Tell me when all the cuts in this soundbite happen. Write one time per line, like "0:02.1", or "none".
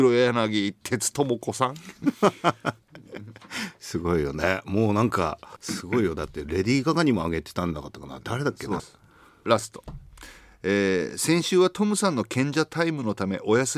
0:05.6
0:08.8